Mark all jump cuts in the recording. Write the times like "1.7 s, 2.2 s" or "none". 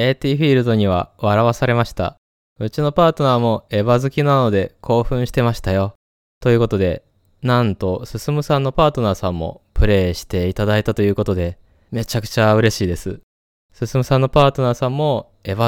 none